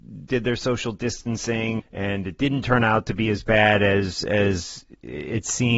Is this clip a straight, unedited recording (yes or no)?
no